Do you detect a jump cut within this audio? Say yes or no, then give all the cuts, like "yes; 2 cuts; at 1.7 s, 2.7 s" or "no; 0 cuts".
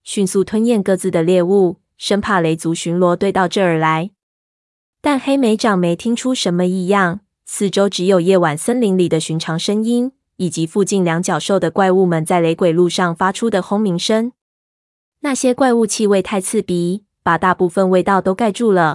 yes; 1 cut; at 1.9 s